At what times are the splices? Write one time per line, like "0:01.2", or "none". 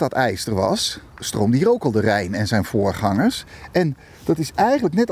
none